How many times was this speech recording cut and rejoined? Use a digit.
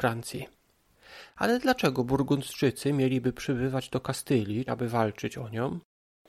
1